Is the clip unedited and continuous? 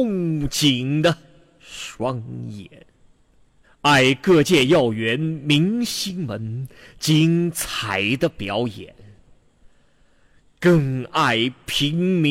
no; 1 cut; at 3.6 s

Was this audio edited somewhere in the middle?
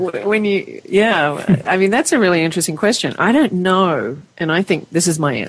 no; 0 cuts

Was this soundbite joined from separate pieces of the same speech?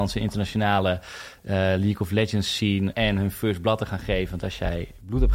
yes; 1 cut; at 2.9 s

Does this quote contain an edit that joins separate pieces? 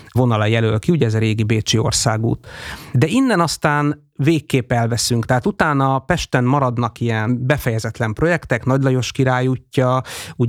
no; 0 cuts

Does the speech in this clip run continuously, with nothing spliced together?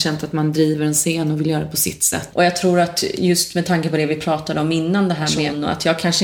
no; 1 cut; at 2.3 s

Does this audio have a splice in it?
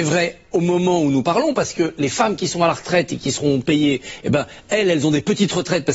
no; 0 cuts

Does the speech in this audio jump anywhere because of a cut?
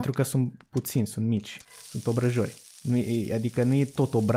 no; 0 cuts

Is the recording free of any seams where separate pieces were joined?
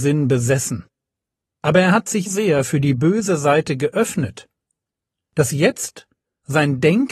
no; 1 cut; at 2.3 s

